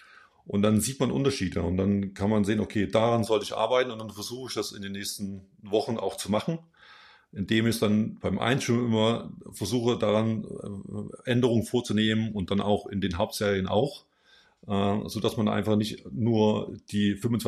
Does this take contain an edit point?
no; 0 cuts

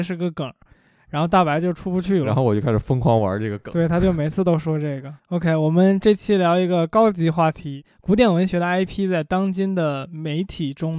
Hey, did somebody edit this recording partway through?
yes; 1 cut; at 5.2 s

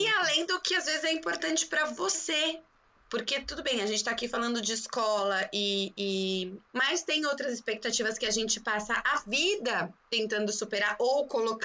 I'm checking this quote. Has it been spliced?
yes; 1 cut; at 6.7 s

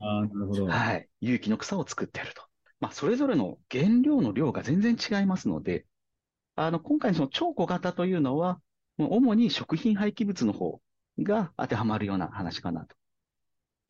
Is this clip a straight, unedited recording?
no; 1 cut; at 2.7 s

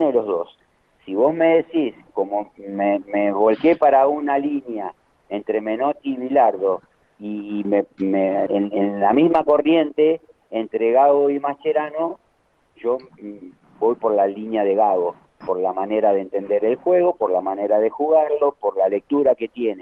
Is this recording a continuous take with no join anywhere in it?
no; 3 cuts; at 2.1 s, 8.5 s, 15.4 s

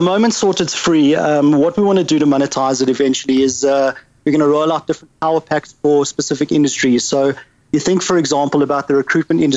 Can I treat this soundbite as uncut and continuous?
yes; 0 cuts

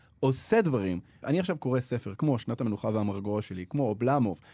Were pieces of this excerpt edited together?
yes; 1 cut; at 1.2 s

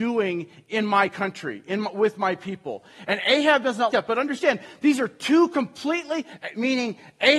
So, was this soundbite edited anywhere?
yes; 1 cut; at 3.9 s

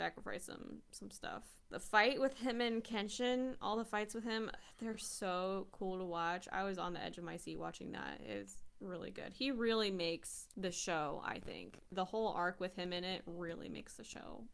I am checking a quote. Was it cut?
no; 0 cuts

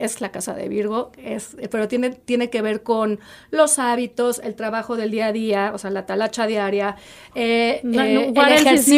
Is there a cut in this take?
no; 0 cuts

